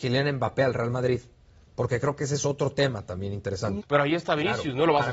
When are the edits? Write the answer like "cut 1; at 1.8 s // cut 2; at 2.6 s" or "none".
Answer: cut 1; at 3.8 s